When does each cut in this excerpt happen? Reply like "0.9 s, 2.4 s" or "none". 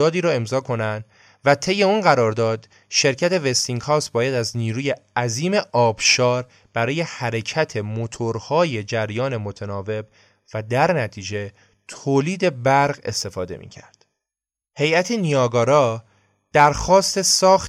14.6 s